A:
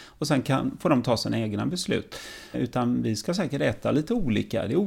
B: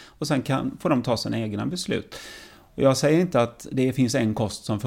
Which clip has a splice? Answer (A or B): A